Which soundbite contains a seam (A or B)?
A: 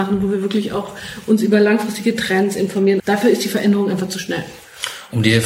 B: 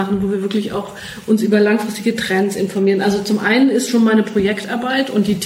A